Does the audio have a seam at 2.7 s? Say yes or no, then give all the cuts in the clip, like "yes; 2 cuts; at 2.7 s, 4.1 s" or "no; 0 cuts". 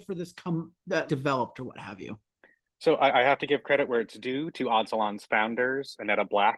no; 1 cut; at 1.1 s